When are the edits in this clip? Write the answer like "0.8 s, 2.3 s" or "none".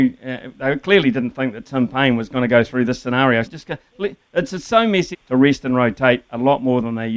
3.4 s, 5.1 s